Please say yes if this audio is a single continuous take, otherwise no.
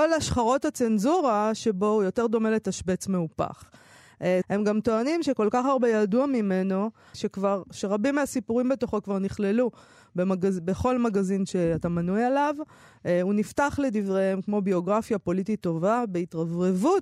no